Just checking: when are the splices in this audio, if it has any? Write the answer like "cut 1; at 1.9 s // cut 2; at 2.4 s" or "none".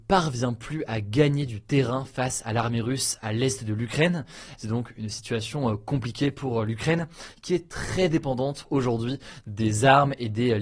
cut 1; at 4.6 s